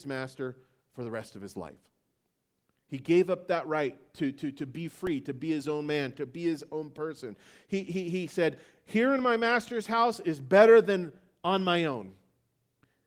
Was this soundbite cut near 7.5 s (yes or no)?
no